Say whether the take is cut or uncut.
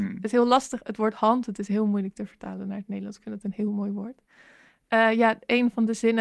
cut